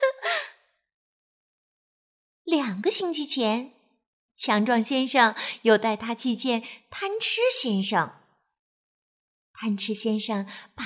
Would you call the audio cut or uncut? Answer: uncut